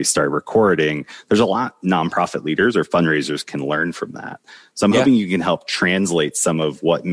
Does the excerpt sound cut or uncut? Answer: uncut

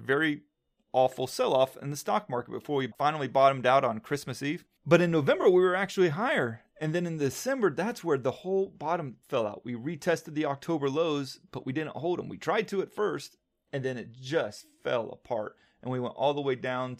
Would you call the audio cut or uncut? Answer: uncut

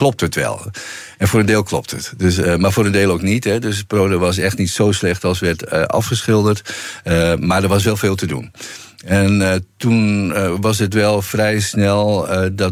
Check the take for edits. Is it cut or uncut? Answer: uncut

